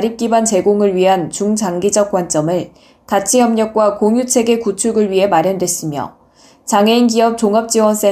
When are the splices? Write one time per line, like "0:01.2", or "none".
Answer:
none